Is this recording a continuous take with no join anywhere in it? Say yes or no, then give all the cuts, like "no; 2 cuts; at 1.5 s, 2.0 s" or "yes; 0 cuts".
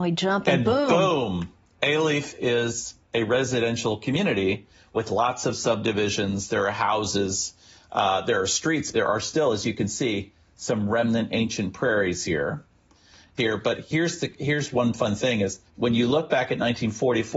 no; 3 cuts; at 8.9 s, 13.4 s, 15.7 s